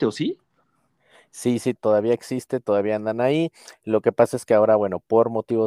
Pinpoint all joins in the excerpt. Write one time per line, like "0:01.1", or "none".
0:01.8